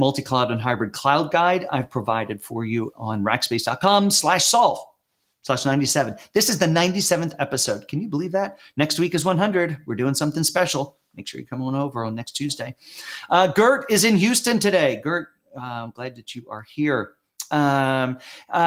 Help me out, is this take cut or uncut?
uncut